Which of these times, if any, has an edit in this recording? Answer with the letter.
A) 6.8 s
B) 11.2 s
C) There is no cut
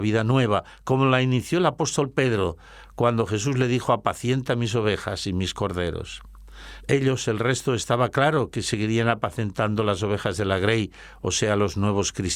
A